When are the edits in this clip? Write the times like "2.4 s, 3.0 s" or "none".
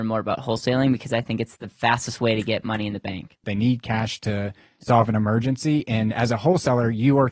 3.4 s